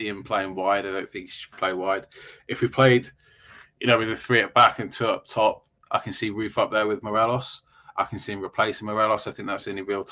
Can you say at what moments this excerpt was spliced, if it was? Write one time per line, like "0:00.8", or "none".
0:05.8